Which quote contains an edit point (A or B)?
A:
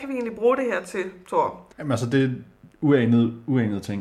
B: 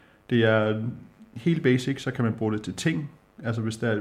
A